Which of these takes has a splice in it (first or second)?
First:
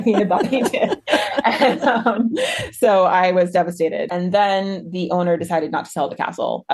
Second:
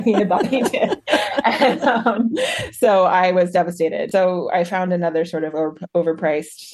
first